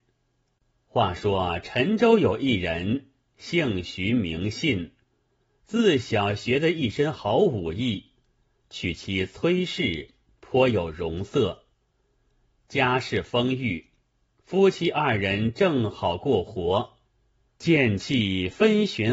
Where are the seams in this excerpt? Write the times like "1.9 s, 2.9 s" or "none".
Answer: 17.5 s